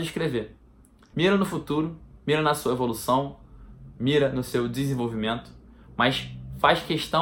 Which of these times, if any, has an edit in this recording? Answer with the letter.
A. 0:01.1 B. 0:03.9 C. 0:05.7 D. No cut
A